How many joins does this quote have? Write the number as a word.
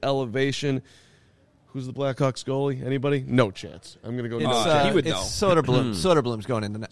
zero